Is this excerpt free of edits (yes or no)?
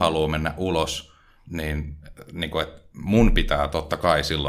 yes